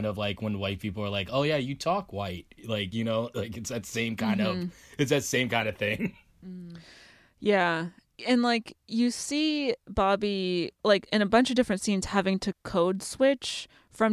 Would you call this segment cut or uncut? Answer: uncut